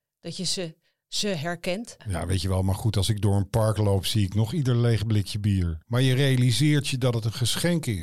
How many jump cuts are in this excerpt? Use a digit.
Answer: 2